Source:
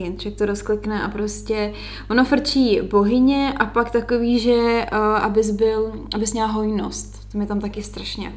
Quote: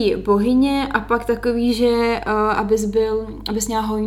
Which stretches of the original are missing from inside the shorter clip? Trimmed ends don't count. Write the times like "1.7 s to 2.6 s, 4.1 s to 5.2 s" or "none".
none